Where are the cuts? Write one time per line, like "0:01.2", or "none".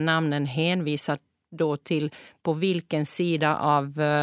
none